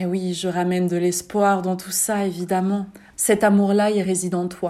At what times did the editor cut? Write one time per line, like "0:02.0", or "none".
0:03.1